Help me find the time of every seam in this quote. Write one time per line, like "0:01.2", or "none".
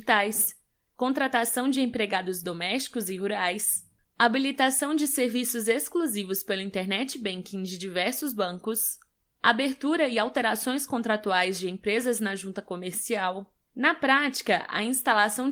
0:04.0
0:13.6